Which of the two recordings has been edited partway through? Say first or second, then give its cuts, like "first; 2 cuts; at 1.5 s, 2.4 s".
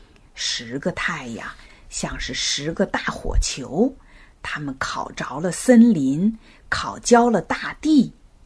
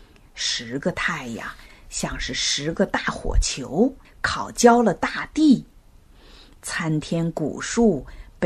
second; 1 cut; at 4.0 s